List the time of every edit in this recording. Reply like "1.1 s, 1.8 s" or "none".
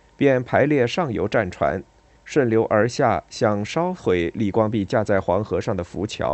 2.2 s